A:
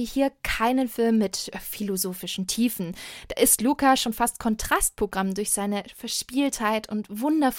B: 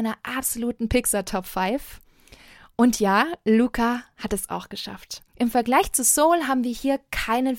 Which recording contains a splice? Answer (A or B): B